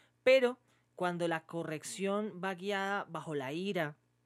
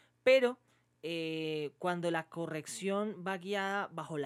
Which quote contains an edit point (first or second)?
first